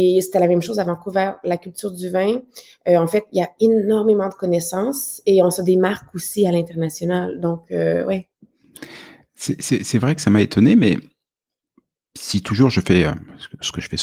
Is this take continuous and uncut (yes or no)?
yes